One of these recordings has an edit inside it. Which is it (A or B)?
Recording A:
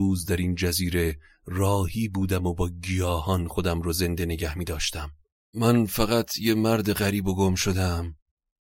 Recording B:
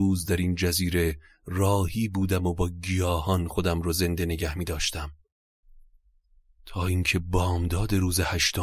A